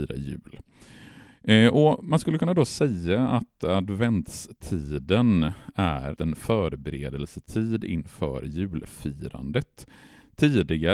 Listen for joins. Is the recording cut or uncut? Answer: cut